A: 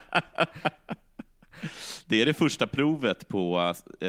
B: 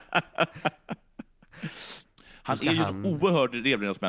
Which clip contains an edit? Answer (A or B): B